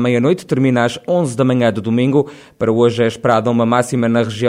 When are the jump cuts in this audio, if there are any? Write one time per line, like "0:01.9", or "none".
none